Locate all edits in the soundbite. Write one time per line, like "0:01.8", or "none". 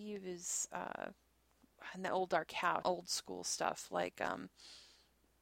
0:02.8

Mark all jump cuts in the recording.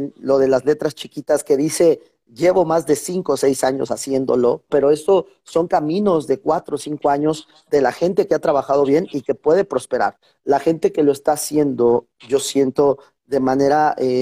0:04.7

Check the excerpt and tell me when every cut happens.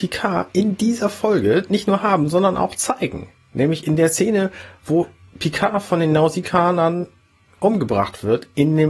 none

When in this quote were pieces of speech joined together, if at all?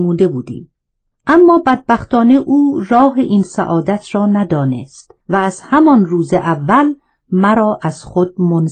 0:01.1
0:05.2

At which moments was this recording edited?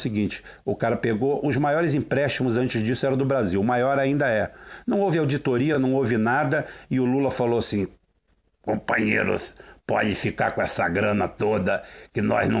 none

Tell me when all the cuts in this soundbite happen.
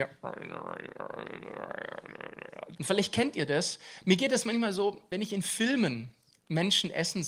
0:02.8

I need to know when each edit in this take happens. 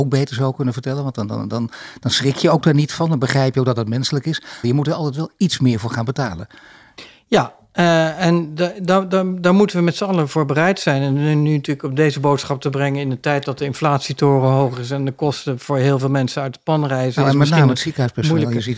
0:04.6

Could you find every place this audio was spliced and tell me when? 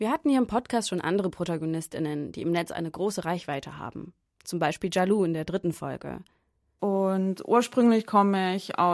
0:06.8

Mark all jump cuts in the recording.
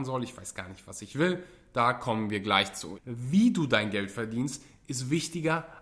0:03.0

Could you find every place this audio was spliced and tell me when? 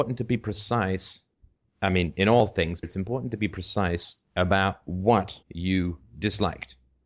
0:02.8
0:04.2
0:05.4

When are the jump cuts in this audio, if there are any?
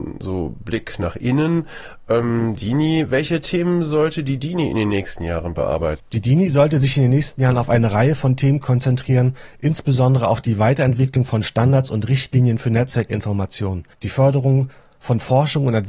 0:06.0
0:13.9

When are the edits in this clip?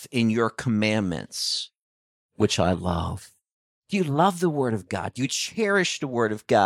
none

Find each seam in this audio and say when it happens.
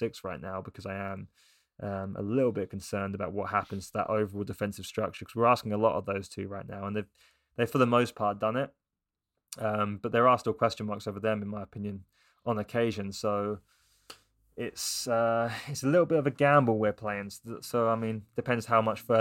none

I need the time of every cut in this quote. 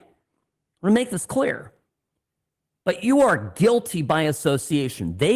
none

